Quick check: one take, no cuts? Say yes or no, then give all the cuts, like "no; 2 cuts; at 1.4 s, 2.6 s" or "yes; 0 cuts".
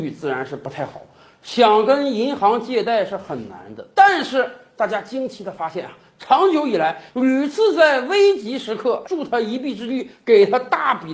no; 2 cuts; at 7.1 s, 9.0 s